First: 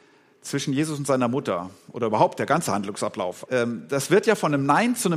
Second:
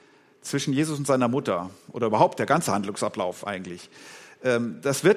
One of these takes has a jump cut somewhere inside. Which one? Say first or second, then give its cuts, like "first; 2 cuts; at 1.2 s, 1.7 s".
first; 1 cut; at 3.4 s